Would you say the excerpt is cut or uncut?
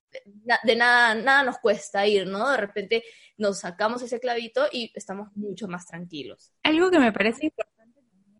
cut